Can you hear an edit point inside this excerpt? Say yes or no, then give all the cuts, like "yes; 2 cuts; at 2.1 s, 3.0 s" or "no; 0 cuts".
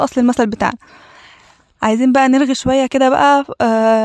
no; 0 cuts